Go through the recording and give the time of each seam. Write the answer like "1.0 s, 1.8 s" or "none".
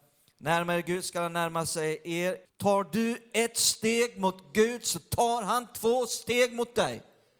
2.5 s